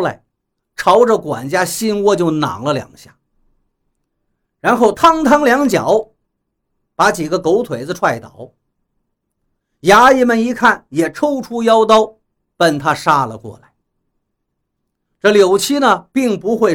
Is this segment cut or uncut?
uncut